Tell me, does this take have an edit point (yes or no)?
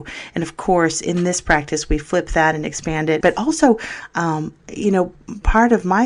yes